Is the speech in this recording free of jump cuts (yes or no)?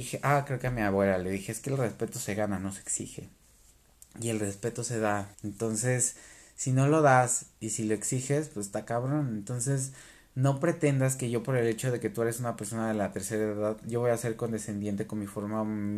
no